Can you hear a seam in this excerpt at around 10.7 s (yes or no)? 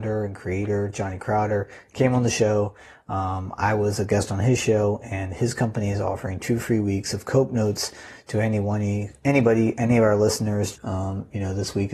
yes